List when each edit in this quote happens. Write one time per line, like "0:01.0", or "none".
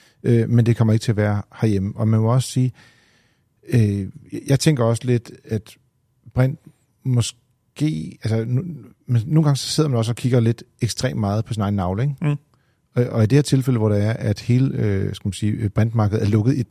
none